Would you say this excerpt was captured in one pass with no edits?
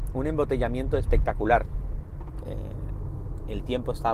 no; 1 cut; at 2.4 s

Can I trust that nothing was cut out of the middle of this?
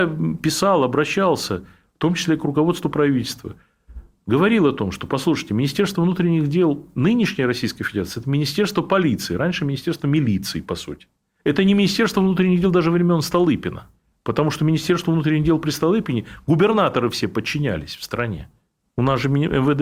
yes; 0 cuts

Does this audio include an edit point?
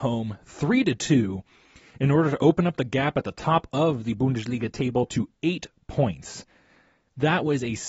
no; 0 cuts

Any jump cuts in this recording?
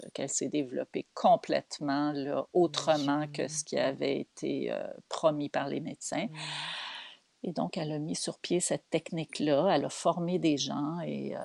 no; 0 cuts

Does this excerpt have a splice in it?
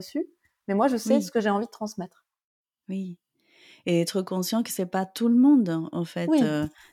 no; 0 cuts

